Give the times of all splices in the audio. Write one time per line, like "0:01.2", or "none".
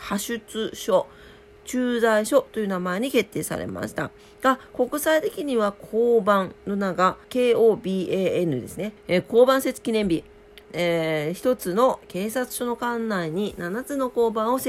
0:07.2
0:09.0
0:10.6